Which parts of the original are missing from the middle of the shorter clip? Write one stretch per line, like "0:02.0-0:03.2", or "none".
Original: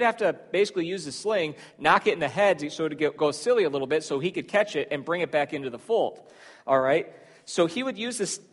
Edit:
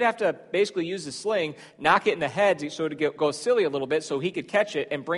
none